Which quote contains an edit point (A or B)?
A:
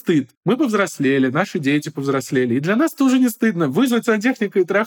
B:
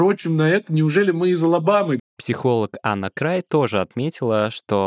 B